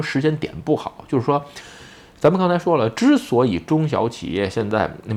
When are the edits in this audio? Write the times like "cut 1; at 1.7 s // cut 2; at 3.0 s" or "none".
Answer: none